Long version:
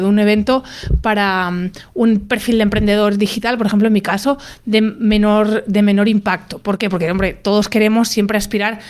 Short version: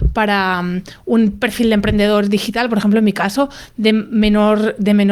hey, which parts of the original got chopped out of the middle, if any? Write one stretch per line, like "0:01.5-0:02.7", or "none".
none